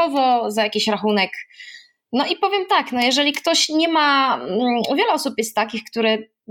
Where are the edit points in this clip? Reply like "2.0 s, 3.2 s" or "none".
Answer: none